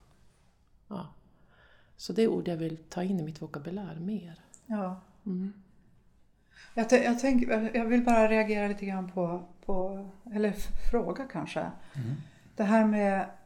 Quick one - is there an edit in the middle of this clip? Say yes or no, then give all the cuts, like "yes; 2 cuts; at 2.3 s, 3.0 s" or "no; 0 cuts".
no; 0 cuts